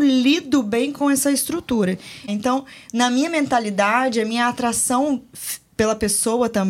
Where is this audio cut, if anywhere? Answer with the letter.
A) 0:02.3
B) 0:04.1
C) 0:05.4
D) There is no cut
A